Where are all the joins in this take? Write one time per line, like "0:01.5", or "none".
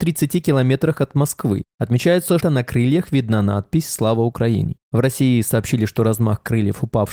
0:02.4